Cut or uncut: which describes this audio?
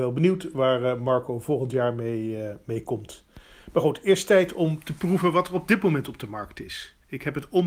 uncut